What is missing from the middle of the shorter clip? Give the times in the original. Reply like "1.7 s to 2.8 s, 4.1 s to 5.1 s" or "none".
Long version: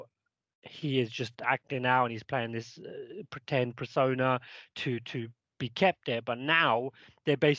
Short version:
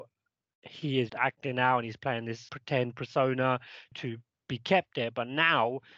1.1 s to 1.4 s, 2.8 s to 3.3 s, 4.7 s to 5.0 s